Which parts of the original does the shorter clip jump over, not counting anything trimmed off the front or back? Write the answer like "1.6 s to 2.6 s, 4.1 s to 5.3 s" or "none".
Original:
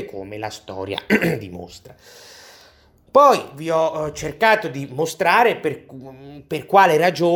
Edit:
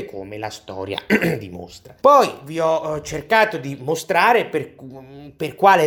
2.0 s to 3.1 s

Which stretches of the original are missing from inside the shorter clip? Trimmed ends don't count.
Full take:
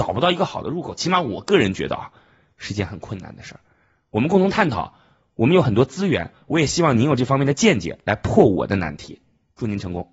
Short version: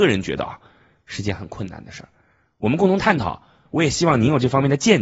5.1 s to 6.4 s

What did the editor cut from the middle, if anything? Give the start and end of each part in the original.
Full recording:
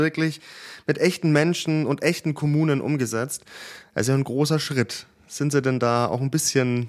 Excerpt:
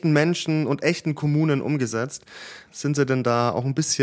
3.8 s to 5.2 s

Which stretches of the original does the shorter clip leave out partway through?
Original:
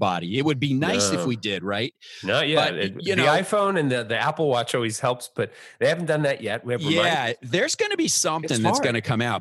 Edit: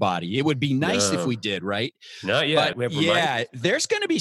2.7 s to 6.6 s

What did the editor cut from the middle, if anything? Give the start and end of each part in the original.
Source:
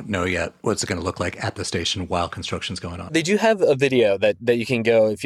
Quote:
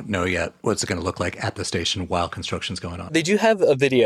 none

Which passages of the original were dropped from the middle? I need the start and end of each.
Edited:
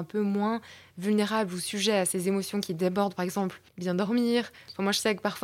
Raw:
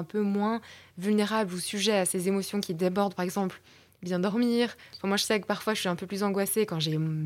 3.7 s to 3.9 s

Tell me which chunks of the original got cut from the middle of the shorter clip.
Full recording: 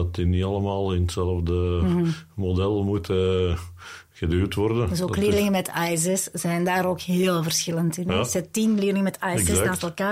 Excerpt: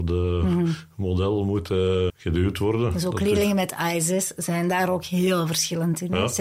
3.5 s to 4.1 s

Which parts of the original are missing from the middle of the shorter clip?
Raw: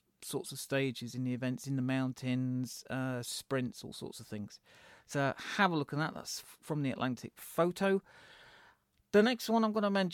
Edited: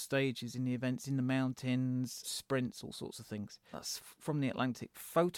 2.8 s to 3.2 s, 4.7 s to 6.1 s

